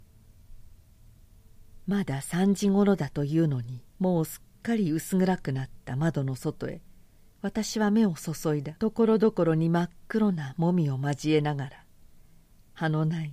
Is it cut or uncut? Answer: cut